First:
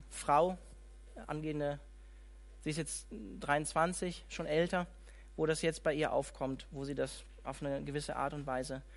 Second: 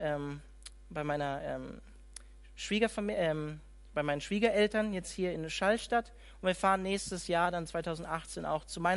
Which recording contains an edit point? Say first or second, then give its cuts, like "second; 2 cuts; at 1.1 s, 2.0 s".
first; 1 cut; at 2.6 s